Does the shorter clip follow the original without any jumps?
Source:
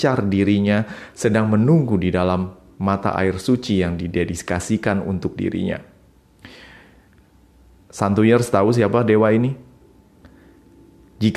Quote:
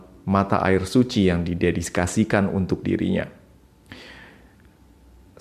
yes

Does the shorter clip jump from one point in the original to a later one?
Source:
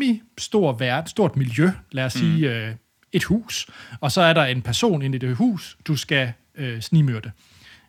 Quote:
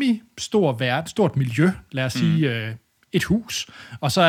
no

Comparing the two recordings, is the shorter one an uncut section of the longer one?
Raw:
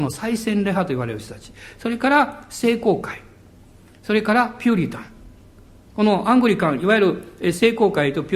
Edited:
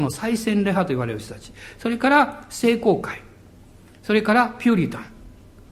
yes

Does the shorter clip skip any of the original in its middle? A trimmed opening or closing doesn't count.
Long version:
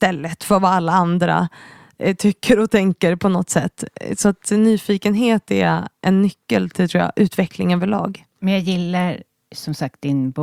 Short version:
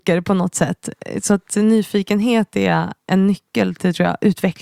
no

